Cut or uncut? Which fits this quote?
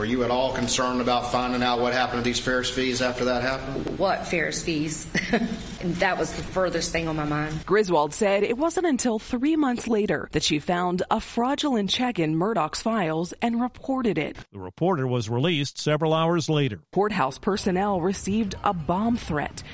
cut